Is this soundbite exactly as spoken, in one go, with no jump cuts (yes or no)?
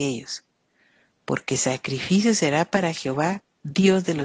yes